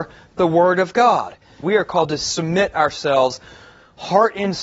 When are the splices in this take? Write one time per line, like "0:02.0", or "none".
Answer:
0:01.6